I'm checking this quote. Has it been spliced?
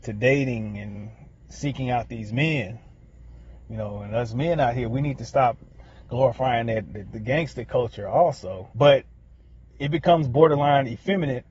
yes; 1 cut; at 8.7 s

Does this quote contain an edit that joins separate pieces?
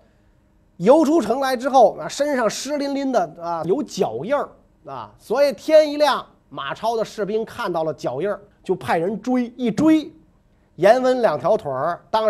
yes; 1 cut; at 3.6 s

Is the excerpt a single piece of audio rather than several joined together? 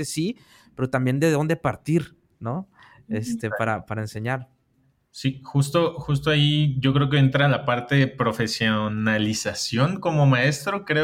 yes; 0 cuts

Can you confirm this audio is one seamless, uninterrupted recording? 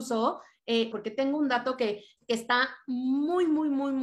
no; 2 cuts; at 0.9 s, 2.2 s

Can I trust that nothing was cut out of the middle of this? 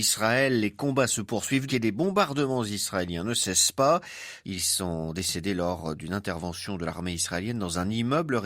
no; 2 cuts; at 1.7 s, 4.4 s

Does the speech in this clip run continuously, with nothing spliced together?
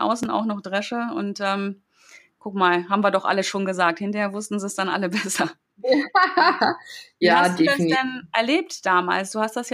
yes; 0 cuts

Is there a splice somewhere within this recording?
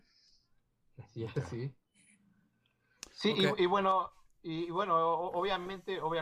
no; 0 cuts

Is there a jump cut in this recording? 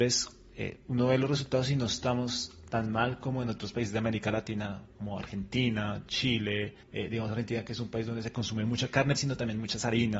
yes; 2 cuts; at 6.8 s, 9.2 s

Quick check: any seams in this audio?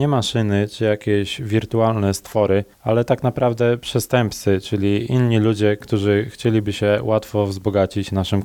yes; 1 cut; at 2.7 s

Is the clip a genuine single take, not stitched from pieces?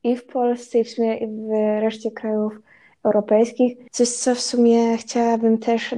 no; 1 cut; at 3.9 s

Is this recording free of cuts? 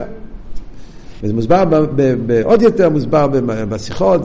no; 1 cut; at 1.2 s

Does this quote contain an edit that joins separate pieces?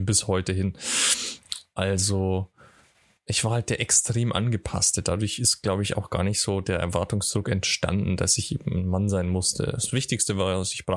no; 0 cuts

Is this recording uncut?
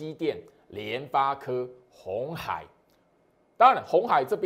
yes; 0 cuts

